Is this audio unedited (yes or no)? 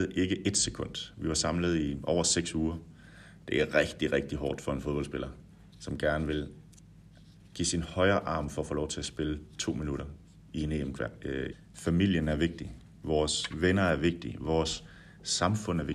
no